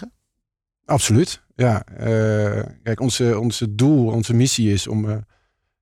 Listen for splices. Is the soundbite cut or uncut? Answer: uncut